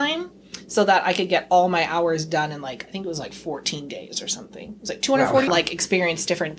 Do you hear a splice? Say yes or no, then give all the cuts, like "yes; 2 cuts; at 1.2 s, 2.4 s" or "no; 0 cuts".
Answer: yes; 1 cut; at 5.5 s